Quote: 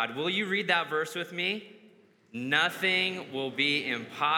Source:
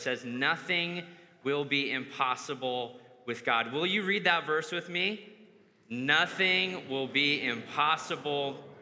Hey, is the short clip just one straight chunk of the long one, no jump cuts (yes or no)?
yes